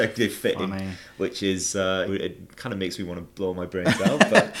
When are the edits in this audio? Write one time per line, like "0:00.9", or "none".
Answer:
0:02.1